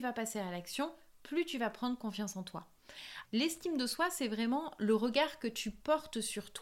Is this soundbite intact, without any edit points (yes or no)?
no